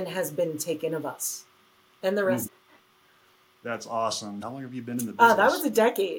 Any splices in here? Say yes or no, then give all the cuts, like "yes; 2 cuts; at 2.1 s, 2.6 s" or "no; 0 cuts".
yes; 2 cuts; at 2.5 s, 4.4 s